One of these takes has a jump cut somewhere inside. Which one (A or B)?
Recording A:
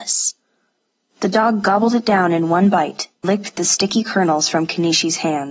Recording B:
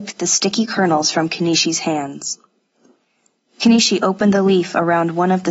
A